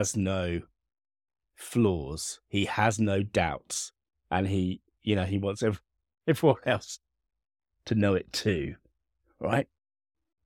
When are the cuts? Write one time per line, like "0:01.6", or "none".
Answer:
0:04.1